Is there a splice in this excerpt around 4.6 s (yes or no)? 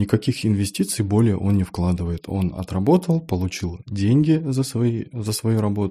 no